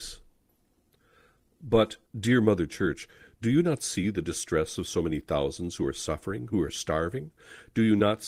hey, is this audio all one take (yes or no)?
no